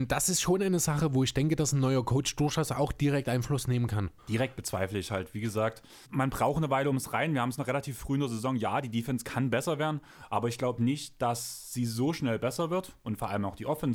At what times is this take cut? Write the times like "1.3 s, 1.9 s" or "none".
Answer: 4.2 s, 6.0 s